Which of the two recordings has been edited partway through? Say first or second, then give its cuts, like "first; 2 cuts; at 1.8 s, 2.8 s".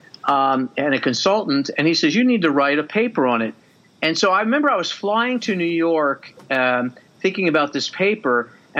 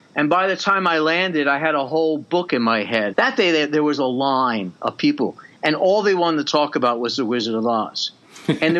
second; 1 cut; at 3.1 s